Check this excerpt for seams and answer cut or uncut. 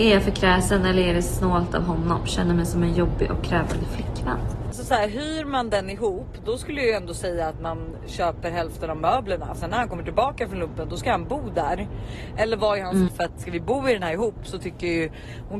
cut